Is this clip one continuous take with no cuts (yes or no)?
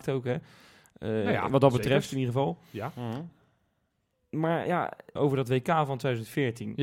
no